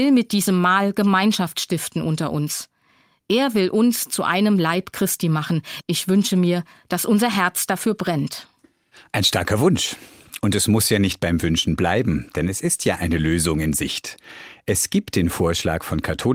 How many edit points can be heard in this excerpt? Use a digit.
1